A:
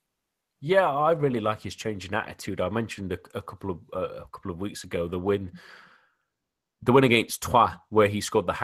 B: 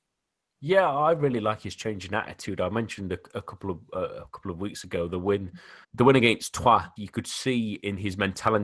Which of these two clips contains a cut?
B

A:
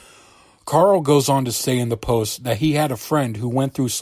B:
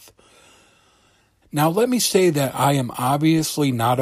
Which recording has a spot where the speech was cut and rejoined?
B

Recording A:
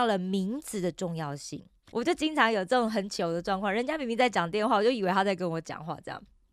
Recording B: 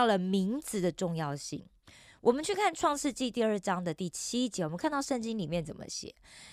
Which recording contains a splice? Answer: A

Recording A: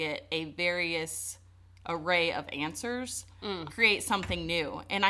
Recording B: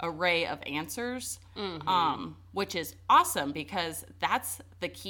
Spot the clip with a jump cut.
A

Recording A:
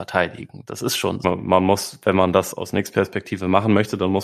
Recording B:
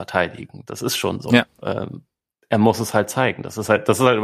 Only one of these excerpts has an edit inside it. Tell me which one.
A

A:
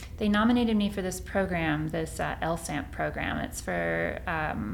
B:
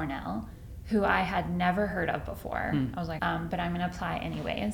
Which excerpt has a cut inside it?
B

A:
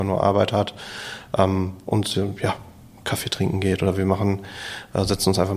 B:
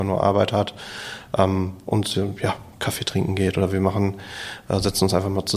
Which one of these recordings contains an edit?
B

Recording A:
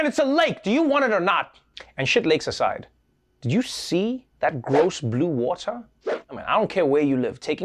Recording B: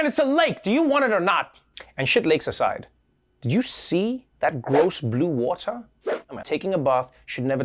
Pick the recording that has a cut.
B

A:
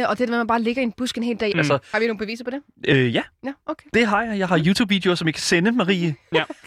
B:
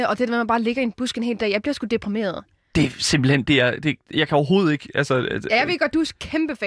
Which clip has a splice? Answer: A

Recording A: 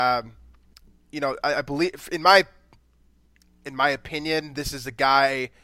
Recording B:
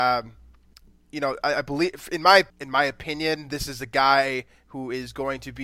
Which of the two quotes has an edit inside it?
B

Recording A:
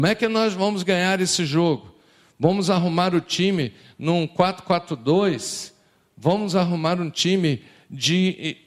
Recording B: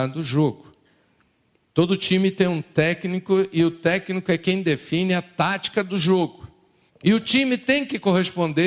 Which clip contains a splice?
B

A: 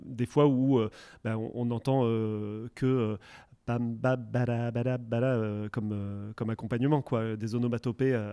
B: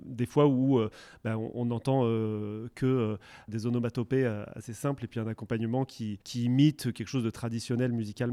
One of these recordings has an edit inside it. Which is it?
B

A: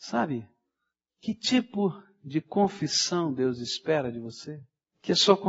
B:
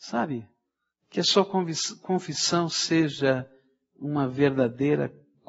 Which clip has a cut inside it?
B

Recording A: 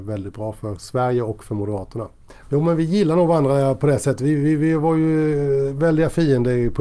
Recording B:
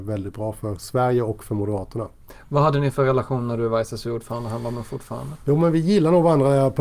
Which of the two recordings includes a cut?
A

